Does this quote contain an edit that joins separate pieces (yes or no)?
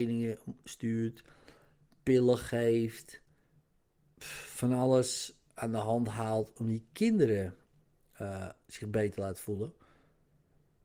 no